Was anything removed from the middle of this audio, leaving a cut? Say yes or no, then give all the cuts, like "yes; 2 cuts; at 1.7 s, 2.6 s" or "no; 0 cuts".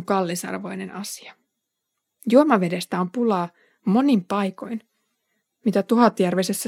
no; 0 cuts